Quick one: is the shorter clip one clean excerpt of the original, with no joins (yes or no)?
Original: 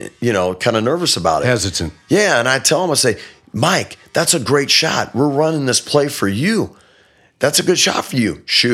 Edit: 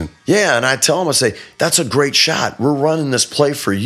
no